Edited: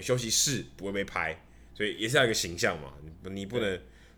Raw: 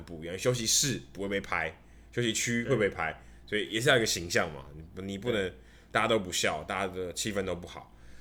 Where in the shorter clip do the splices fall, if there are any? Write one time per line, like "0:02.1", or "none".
0:01.7